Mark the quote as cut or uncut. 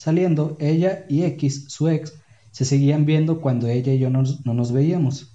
uncut